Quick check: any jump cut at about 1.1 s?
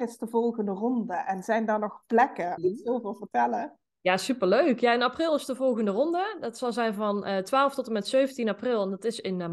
no; 1 cut; at 2.6 s

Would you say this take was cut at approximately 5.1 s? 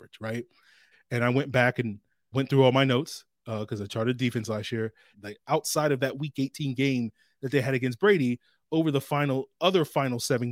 yes; 3 cuts; at 0.9 s, 2.3 s, 5.1 s

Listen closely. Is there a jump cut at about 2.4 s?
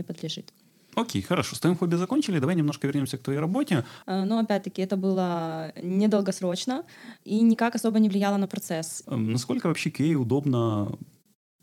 no; 2 cuts; at 4.0 s, 9.0 s

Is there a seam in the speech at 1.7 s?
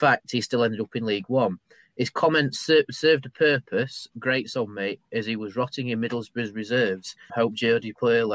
no; 1 cut; at 7.3 s

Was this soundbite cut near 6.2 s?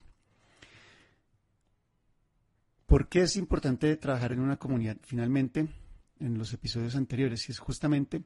yes; 1 cut; at 6.2 s

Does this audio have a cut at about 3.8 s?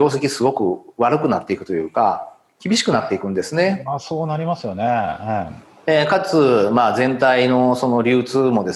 no; 0 cuts

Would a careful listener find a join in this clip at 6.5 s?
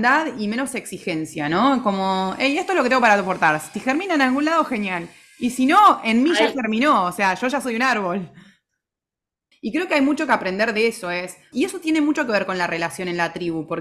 no; 3 cuts; at 3.7 s, 9.5 s, 11.5 s

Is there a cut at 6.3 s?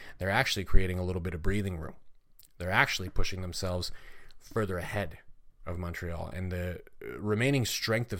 no; 0 cuts

